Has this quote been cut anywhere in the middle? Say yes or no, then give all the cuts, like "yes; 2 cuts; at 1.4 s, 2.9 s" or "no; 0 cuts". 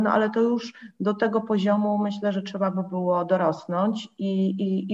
no; 0 cuts